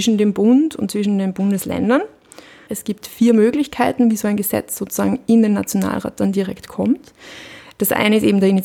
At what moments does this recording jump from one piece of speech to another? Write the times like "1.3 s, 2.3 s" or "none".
2.7 s